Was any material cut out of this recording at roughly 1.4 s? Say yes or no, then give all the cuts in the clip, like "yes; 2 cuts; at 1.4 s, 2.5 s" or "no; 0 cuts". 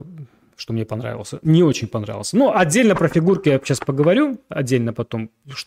no; 0 cuts